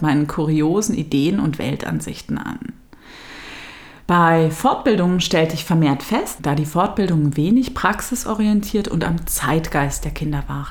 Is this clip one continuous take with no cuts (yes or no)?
no